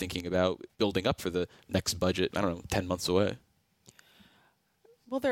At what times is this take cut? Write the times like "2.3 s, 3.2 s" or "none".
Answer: 1.2 s, 2.3 s

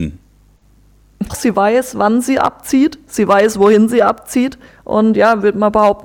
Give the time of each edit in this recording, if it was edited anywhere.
1.3 s, 4.7 s

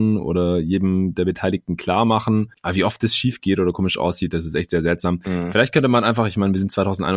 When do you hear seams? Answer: none

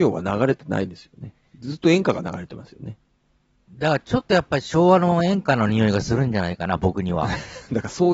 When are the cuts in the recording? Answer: none

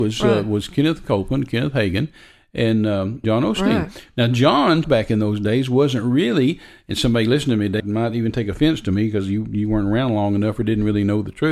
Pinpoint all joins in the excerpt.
3.2 s, 4.8 s, 7.8 s

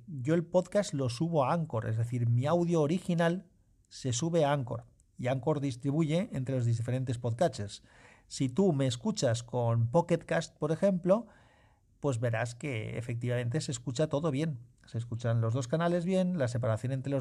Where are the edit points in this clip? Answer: none

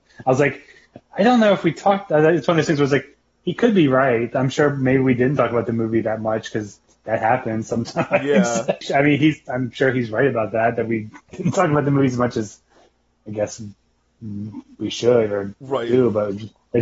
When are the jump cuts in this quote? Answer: 8.8 s, 11.3 s

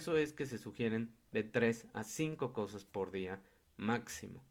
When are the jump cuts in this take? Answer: none

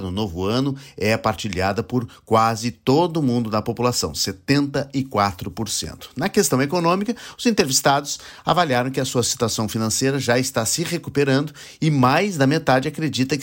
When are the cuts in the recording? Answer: none

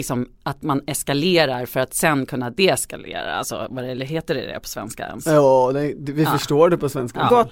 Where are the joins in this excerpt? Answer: none

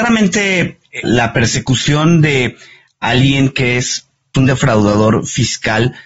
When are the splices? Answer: 1.0 s, 4.3 s

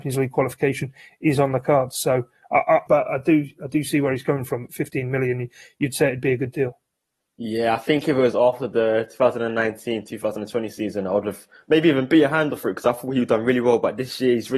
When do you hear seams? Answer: 2.9 s

